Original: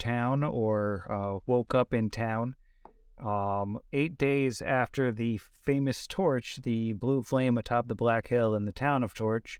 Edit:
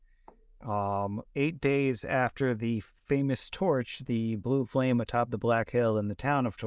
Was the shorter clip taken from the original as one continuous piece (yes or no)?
yes